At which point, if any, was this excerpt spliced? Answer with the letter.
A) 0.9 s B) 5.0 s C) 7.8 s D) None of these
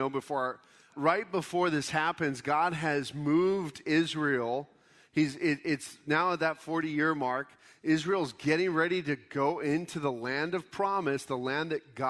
A